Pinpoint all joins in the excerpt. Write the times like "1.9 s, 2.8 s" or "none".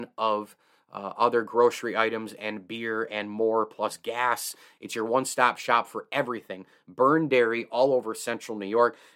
none